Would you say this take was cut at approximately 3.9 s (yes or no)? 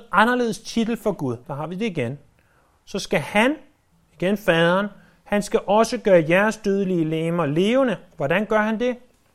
yes